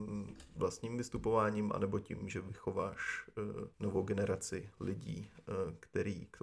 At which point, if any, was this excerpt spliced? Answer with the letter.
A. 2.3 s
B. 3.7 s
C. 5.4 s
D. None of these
B